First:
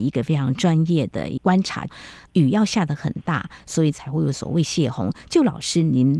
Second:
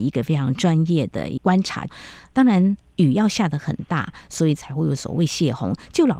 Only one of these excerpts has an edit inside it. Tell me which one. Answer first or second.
first